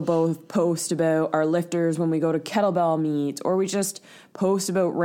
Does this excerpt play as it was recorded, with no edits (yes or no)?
yes